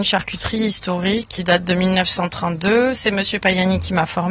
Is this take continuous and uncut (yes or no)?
no